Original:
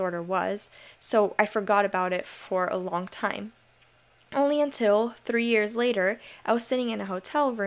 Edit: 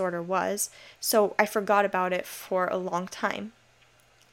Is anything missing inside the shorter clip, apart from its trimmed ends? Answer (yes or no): no